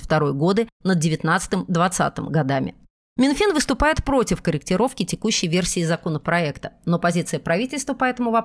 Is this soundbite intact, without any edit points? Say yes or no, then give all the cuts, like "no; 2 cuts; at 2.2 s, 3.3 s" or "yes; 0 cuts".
yes; 0 cuts